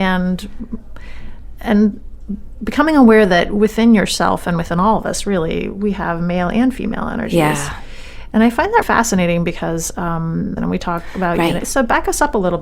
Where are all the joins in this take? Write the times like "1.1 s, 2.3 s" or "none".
8.8 s, 10.6 s, 11.6 s